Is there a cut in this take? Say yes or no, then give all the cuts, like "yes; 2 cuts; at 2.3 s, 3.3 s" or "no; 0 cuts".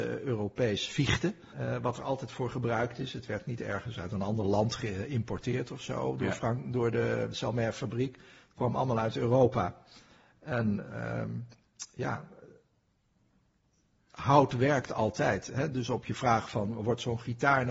yes; 1 cut; at 1.5 s